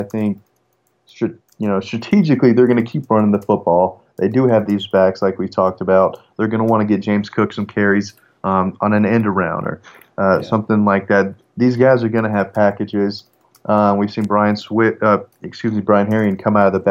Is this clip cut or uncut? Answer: uncut